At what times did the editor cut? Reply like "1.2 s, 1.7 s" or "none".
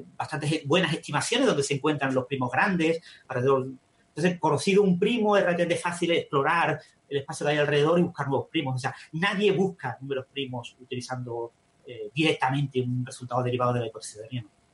none